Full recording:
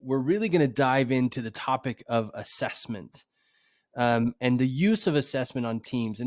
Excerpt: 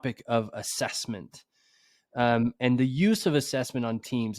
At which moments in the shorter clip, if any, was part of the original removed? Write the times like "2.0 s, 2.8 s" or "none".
none